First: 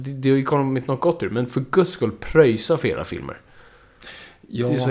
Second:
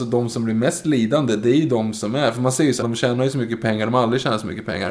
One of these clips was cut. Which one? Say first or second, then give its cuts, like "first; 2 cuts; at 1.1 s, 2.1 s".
second; 1 cut; at 2.8 s